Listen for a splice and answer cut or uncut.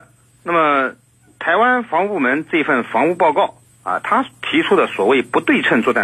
uncut